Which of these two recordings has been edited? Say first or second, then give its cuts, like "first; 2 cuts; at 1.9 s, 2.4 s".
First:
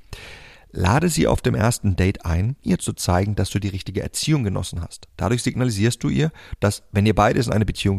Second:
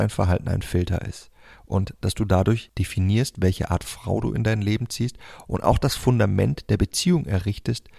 first; 1 cut; at 2.6 s